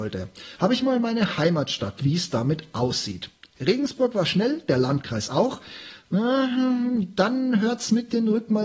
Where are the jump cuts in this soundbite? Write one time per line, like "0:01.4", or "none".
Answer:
0:02.0